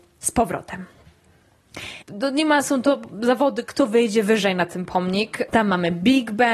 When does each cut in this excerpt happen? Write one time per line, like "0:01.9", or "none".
0:02.0
0:05.5